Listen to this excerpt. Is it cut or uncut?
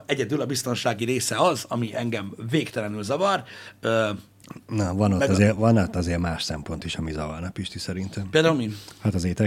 uncut